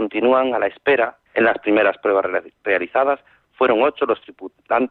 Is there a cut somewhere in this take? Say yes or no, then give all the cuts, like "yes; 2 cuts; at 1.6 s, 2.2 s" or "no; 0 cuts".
yes; 1 cut; at 1.3 s